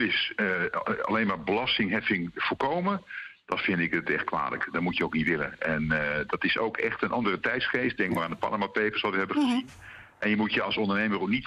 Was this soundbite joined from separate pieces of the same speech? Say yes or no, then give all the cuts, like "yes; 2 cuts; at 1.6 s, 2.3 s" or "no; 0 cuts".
no; 0 cuts